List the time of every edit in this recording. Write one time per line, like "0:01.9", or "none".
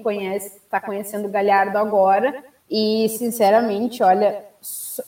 0:02.6